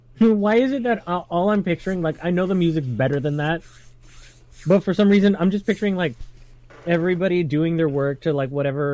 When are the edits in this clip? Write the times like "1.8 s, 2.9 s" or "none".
none